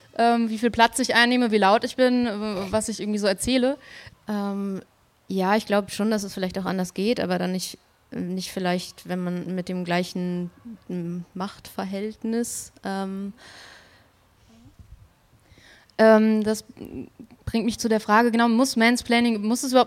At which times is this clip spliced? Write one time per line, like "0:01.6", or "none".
0:04.1
0:14.4